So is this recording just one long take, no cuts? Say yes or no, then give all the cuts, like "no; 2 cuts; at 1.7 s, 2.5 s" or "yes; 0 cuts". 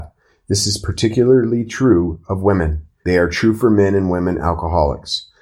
no; 1 cut; at 3.0 s